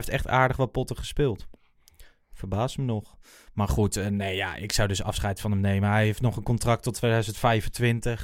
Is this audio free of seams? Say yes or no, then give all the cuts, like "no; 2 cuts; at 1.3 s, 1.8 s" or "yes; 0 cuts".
yes; 0 cuts